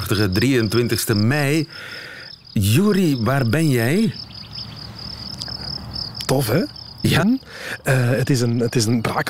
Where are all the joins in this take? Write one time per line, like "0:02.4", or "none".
0:07.2